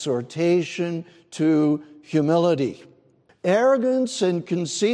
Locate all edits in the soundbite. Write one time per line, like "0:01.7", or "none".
0:03.3

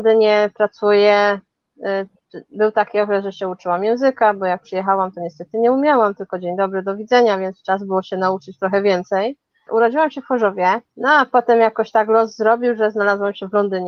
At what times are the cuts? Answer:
0:09.7
0:10.9

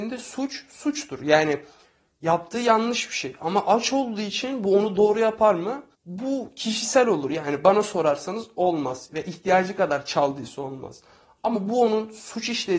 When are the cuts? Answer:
0:05.9

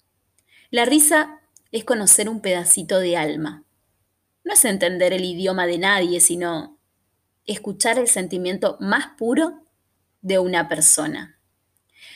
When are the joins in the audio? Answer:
0:01.7

